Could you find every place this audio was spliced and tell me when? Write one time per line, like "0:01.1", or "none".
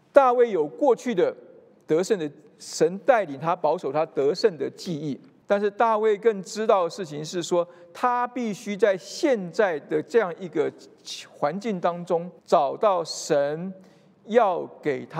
0:05.4
0:12.4